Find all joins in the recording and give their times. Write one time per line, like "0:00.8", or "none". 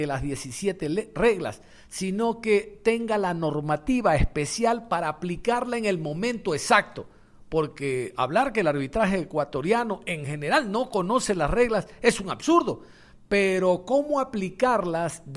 none

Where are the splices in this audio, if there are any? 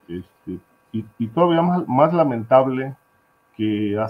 none

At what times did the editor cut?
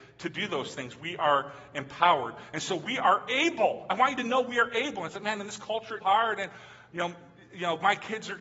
0:06.0

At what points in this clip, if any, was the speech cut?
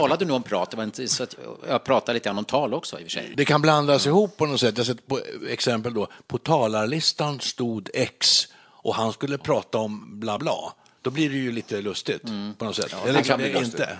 0:10.4

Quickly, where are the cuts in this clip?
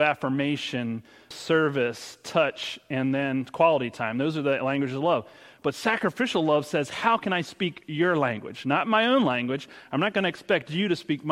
0:01.3

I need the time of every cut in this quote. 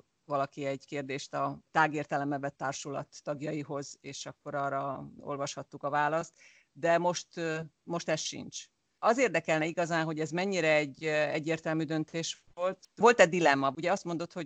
none

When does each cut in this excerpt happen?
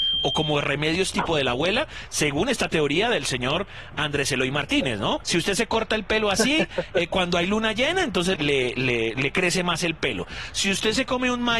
0:05.2
0:08.4

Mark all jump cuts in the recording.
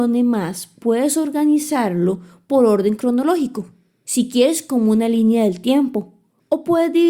none

